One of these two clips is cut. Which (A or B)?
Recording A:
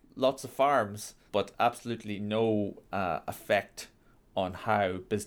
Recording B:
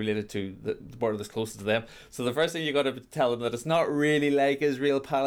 A